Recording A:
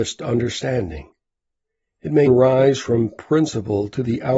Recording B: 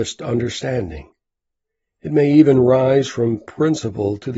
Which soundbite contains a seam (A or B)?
A